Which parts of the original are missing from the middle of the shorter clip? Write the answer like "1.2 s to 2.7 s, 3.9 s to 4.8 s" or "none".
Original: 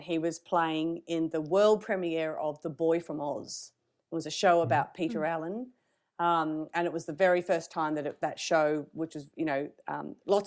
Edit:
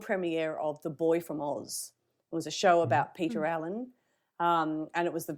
none